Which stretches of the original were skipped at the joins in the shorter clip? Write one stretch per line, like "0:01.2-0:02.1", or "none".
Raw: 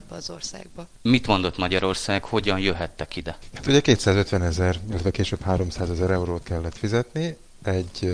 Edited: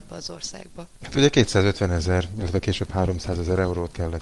0:01.0-0:03.5